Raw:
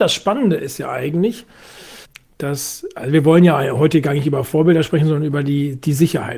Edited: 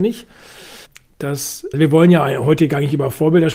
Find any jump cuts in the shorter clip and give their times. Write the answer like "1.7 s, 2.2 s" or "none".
1.7 s

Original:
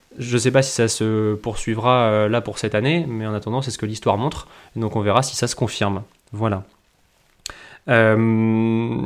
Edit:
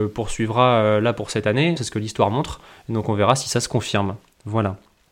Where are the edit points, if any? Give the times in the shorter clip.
1.8 s

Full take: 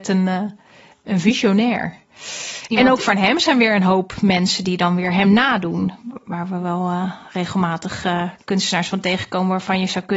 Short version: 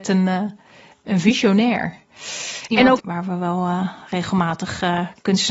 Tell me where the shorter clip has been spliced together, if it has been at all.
3.0 s

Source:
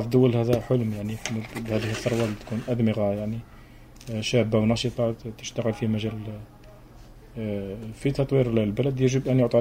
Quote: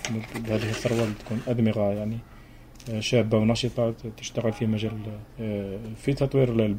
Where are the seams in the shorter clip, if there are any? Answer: 5.3 s

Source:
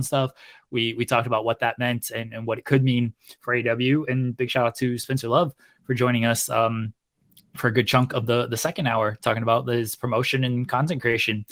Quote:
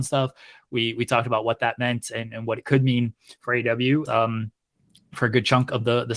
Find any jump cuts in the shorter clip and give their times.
4.1 s

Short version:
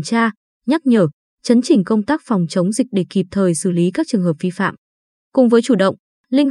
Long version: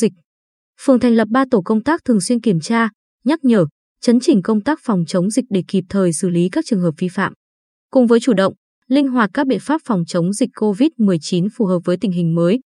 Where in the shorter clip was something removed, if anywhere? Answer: none

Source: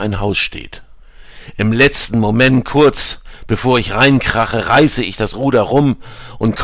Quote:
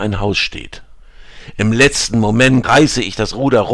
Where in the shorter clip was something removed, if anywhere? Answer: 2.6 s

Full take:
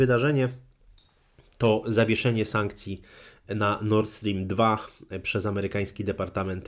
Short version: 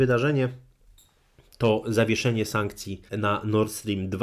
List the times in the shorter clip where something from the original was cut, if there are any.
3.1 s

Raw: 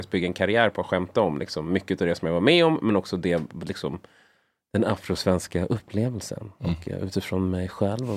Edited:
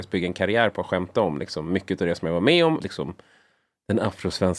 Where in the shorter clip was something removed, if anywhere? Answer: 2.8 s

